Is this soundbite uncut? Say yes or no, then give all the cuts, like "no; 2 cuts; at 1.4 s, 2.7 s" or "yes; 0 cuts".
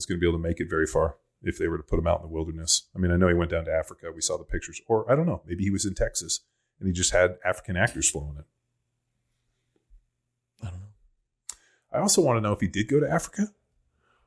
yes; 0 cuts